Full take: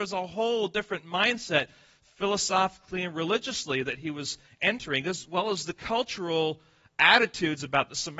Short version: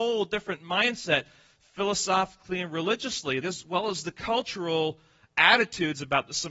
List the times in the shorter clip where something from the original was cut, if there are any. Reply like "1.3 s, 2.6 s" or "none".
3.4 s